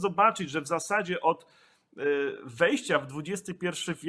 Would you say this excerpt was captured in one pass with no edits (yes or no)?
yes